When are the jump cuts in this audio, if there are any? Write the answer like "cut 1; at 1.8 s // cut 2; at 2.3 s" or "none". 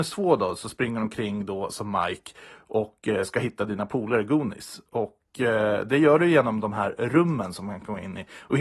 none